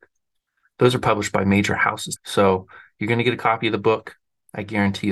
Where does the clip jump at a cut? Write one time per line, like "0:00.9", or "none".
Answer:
0:02.2